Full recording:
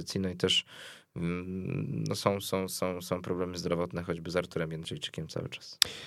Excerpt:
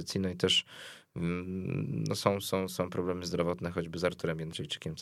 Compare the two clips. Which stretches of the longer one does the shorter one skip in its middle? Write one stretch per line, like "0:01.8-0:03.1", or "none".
0:02.7-0:03.0